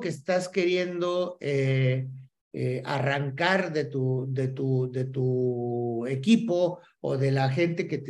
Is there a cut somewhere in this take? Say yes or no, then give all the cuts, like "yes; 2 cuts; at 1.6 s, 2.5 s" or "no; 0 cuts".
no; 0 cuts